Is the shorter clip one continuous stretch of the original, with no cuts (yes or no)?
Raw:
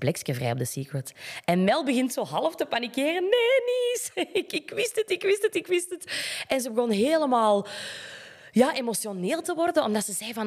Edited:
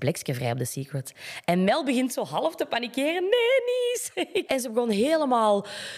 no